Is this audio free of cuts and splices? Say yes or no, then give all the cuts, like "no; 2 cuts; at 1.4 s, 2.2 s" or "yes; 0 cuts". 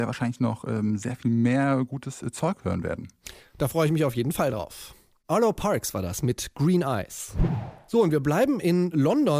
yes; 0 cuts